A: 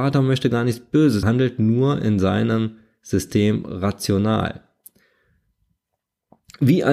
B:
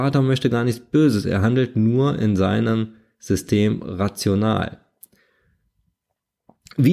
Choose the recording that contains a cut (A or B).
A